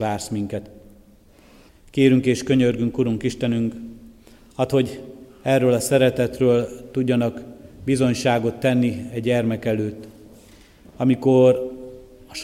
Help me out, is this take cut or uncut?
cut